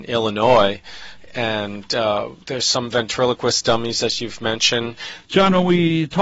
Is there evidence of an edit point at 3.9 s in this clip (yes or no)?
no